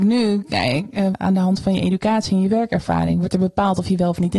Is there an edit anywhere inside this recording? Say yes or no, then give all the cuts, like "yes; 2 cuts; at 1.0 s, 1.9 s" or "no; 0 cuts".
yes; 1 cut; at 1.1 s